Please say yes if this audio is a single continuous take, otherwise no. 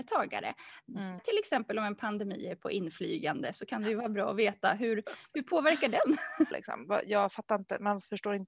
no